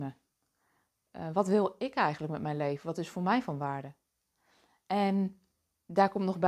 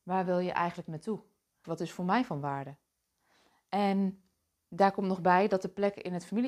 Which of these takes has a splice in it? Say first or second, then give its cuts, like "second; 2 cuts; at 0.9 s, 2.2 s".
second; 1 cut; at 1.6 s